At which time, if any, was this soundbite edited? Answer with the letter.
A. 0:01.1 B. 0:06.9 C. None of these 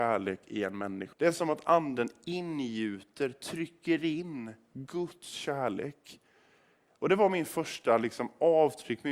A